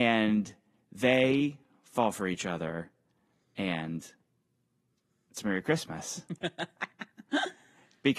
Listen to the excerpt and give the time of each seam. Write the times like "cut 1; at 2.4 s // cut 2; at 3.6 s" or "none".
none